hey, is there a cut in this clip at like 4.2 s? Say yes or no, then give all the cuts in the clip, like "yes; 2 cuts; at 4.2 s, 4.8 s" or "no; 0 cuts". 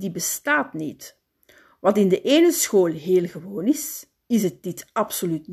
yes; 1 cut; at 4.2 s